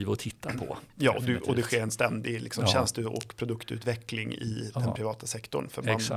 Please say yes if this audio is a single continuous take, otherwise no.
yes